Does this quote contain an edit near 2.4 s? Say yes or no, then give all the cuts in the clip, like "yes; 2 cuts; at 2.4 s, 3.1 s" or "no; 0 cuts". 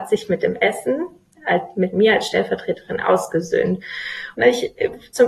no; 1 cut; at 4.3 s